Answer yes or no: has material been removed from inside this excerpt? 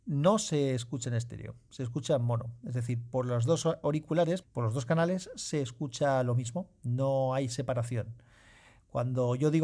yes